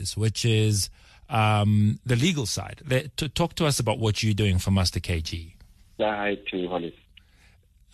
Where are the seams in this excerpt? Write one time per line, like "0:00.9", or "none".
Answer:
0:06.0